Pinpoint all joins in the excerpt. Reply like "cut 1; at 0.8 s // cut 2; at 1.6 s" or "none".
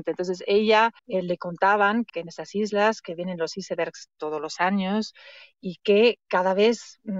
cut 1; at 1.0 s // cut 2; at 2.1 s